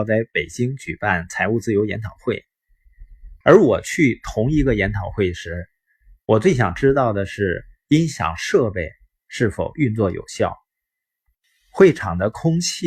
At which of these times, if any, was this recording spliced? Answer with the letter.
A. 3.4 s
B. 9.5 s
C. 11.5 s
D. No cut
A